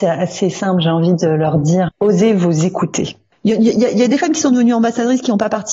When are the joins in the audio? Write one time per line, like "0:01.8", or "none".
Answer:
0:01.9
0:03.3